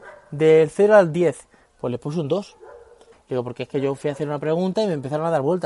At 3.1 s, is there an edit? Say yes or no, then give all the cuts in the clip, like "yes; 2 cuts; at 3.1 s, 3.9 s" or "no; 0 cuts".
yes; 1 cut; at 3.1 s